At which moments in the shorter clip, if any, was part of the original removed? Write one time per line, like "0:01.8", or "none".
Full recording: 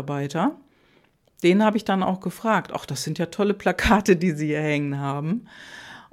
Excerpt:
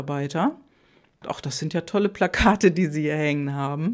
0:01.2